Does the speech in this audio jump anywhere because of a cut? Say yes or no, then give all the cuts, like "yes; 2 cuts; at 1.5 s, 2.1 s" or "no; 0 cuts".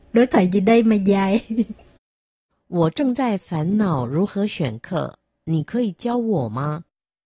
no; 0 cuts